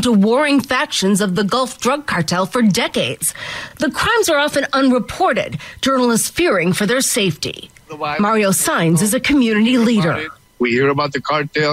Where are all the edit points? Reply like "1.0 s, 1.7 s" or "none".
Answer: none